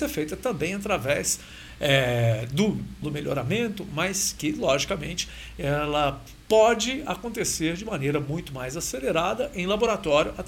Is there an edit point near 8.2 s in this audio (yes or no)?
no